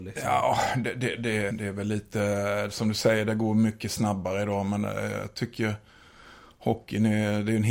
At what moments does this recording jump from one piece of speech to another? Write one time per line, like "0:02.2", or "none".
0:01.5